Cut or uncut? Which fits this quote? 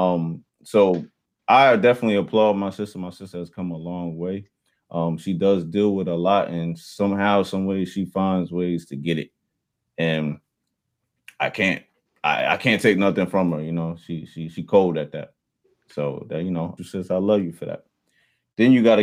cut